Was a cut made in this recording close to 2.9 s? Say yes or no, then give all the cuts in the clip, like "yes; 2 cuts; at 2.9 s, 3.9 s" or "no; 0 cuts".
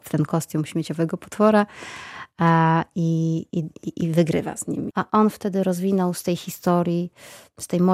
no; 1 cut; at 4.9 s